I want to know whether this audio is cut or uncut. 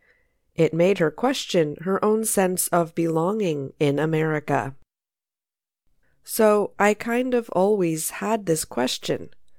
cut